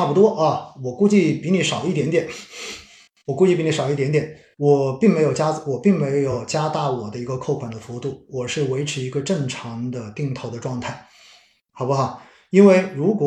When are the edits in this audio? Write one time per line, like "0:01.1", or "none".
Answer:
0:11.7